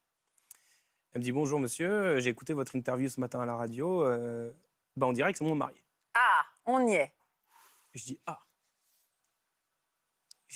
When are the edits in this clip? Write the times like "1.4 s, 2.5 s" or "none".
4.8 s